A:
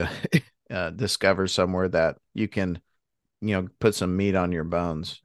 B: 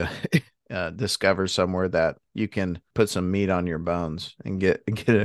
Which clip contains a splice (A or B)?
B